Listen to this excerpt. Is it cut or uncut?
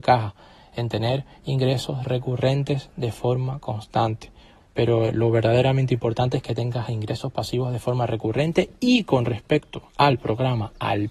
cut